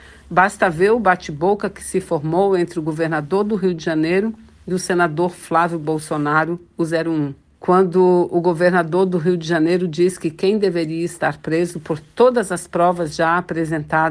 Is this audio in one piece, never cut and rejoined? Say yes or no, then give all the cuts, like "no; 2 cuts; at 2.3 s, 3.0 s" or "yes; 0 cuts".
no; 1 cut; at 7.5 s